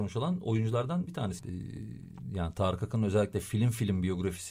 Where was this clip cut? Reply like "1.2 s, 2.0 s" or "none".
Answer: 1.4 s